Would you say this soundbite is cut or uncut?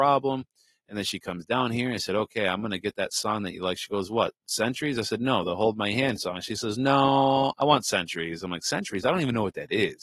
uncut